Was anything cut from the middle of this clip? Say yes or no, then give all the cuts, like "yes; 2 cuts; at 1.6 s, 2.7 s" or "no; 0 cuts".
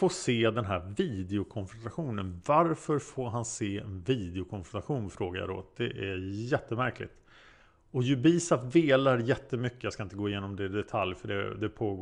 no; 0 cuts